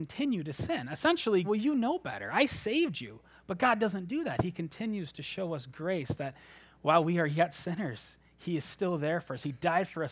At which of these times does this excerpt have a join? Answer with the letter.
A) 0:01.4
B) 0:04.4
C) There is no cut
A